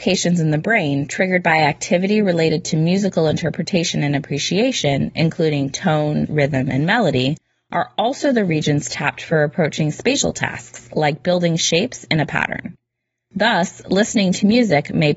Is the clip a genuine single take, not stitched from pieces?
no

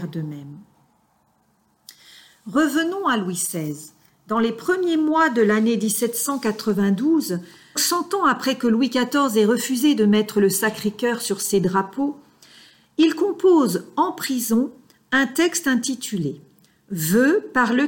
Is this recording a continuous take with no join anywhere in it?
no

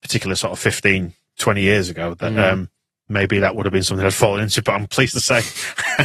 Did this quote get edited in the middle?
no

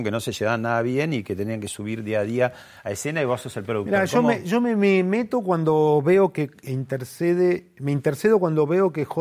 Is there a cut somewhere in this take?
no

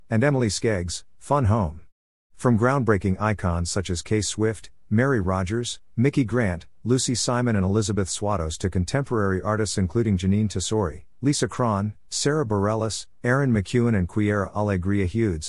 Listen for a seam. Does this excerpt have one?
no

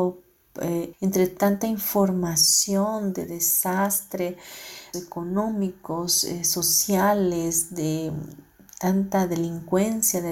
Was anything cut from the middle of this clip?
yes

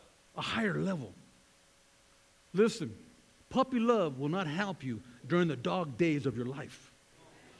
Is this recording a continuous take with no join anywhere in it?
yes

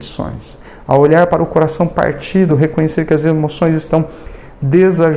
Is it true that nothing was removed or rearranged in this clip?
no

